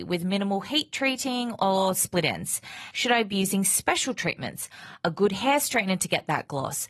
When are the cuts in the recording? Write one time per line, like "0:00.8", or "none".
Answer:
0:02.9

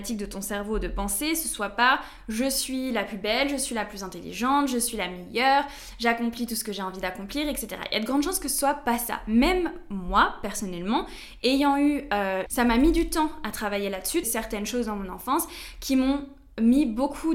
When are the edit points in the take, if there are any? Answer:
0:12.5
0:14.2

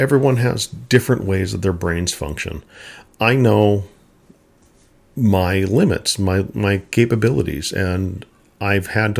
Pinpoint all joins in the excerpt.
none

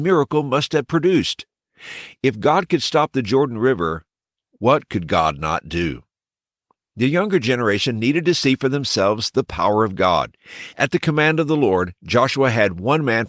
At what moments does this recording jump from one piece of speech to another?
0:10.7

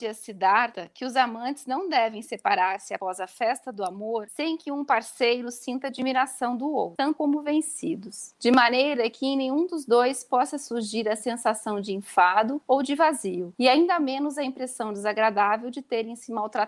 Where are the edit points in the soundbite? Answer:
0:07.0

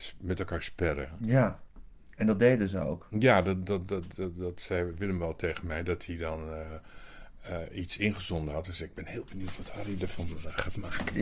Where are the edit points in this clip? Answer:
0:03.9

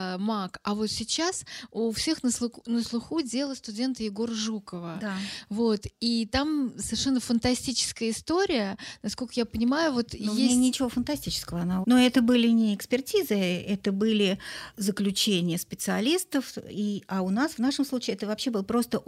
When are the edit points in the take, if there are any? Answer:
0:11.8

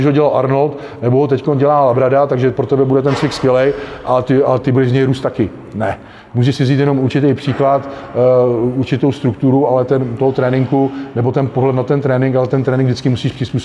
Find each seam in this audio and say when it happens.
none

